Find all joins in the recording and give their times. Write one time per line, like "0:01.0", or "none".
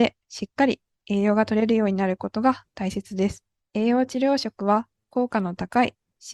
0:03.6